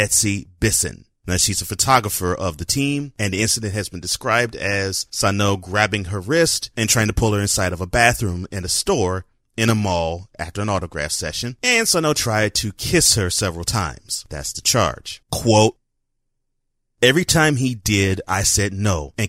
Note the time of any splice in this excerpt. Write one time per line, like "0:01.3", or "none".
0:15.2

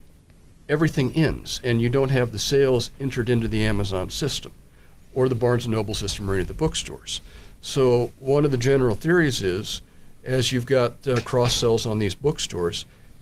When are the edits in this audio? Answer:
none

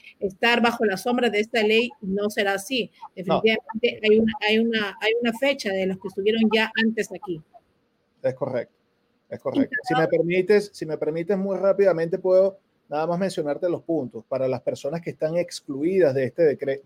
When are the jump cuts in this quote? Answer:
0:09.8

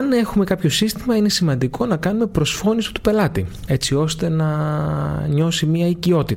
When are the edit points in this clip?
0:03.7

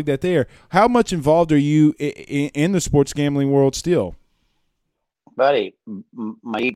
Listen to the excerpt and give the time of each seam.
none

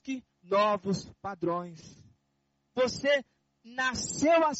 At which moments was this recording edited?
0:02.7

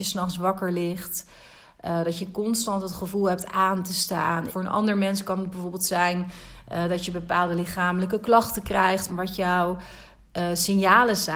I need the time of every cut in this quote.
0:04.5
0:09.1

